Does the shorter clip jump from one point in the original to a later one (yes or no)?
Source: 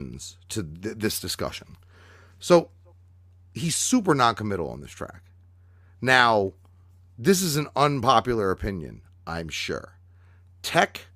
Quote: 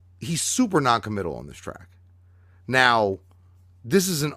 no